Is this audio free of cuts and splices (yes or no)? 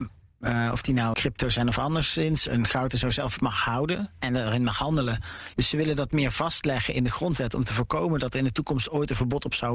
no